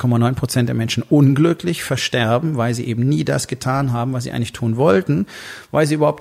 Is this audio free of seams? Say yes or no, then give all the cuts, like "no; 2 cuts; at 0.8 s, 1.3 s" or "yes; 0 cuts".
yes; 0 cuts